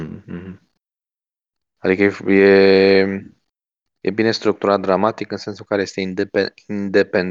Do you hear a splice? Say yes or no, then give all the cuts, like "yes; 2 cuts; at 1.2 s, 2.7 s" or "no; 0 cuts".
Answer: no; 0 cuts